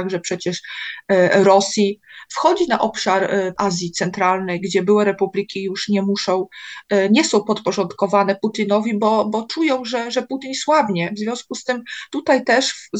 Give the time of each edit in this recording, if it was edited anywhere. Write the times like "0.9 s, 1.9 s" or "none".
none